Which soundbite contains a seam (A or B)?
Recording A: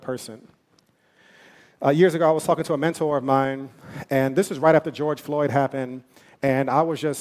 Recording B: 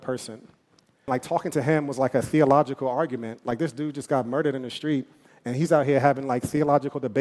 B